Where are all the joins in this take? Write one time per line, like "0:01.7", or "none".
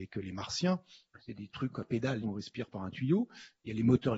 0:01.2
0:02.2